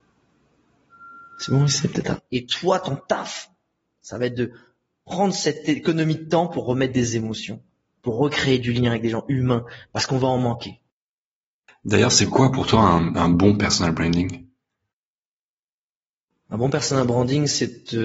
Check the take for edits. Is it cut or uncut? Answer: cut